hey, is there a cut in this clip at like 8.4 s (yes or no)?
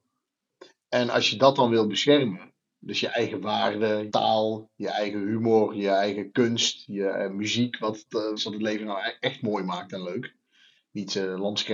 yes